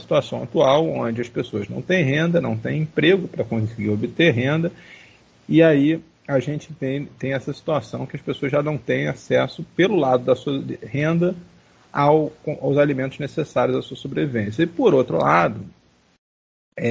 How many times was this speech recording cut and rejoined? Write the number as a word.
zero